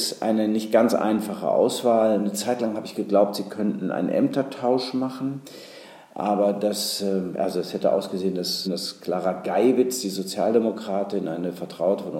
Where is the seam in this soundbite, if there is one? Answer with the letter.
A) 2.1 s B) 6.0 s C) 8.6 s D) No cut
C